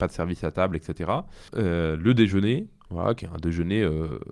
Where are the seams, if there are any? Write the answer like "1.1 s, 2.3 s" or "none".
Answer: 1.5 s

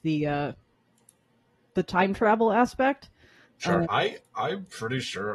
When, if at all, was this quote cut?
3.8 s

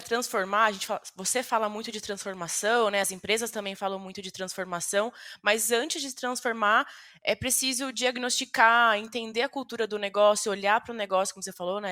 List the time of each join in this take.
none

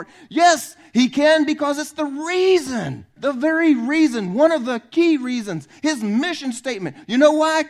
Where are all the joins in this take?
3.2 s

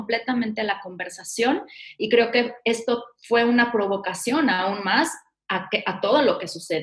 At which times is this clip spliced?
none

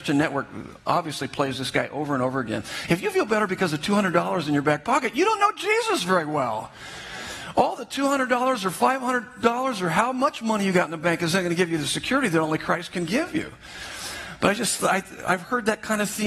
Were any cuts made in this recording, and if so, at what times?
2.9 s

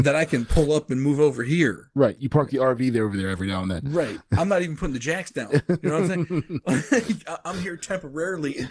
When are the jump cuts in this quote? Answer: none

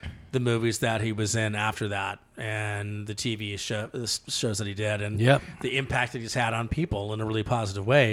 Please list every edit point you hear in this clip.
none

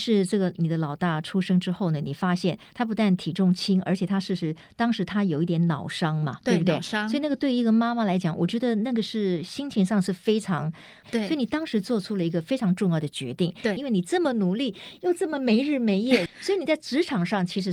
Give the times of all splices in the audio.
11.0 s, 13.8 s, 16.3 s

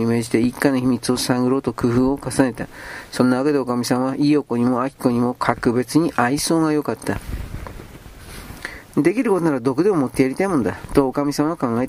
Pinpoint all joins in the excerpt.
none

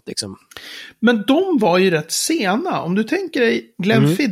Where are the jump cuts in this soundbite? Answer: none

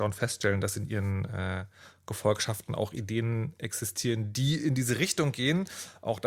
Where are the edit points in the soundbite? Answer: none

